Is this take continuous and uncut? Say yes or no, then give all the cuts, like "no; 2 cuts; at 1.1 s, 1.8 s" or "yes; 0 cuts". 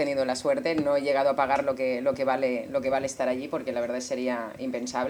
yes; 0 cuts